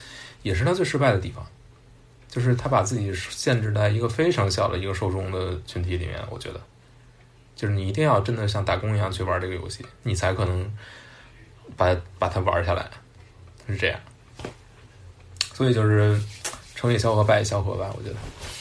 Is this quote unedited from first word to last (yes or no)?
yes